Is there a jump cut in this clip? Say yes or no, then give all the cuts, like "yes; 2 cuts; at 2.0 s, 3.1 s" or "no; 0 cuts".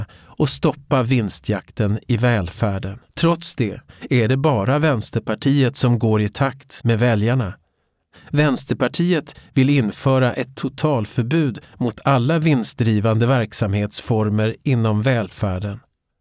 yes; 1 cut; at 3.1 s